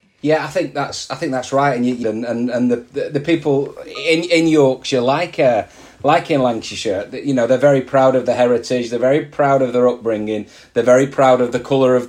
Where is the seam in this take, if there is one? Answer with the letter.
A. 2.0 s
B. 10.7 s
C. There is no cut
A